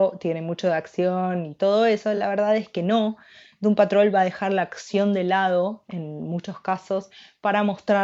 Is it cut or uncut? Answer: uncut